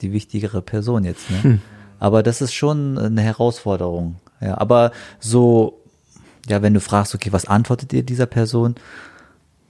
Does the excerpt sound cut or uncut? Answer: uncut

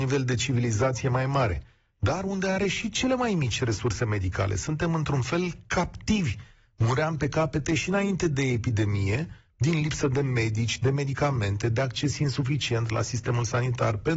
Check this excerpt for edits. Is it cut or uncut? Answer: uncut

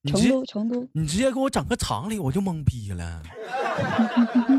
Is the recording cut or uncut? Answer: uncut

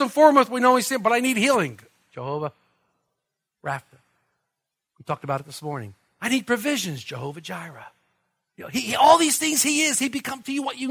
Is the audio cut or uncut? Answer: uncut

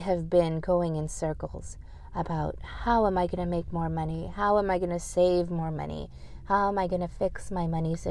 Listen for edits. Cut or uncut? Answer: uncut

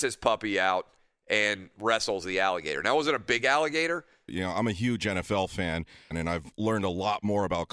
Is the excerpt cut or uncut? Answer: cut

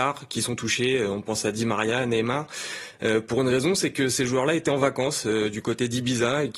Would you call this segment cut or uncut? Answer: uncut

